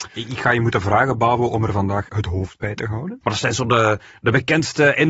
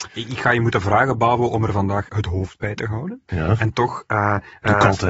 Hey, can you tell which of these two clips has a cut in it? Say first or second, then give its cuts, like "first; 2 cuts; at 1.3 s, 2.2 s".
first; 1 cut; at 3.2 s